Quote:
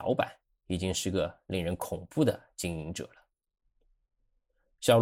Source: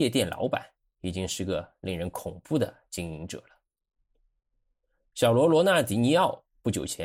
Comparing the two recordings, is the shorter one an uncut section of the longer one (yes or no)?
yes